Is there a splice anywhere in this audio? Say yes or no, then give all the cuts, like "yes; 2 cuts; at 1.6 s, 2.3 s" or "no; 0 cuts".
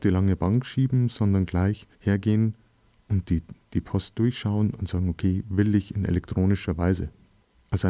yes; 1 cut; at 1.9 s